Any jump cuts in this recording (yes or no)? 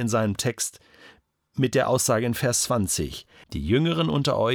yes